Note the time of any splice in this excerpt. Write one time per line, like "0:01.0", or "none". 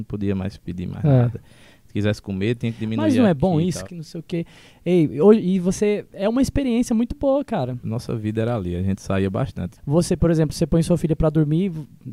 0:03.8
0:07.8
0:09.8